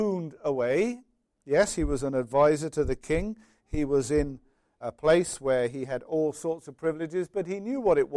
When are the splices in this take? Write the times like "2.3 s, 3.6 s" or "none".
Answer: 4.8 s